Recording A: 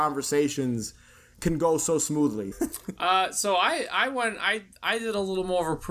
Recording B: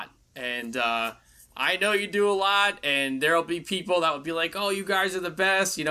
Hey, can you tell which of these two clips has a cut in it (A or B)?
A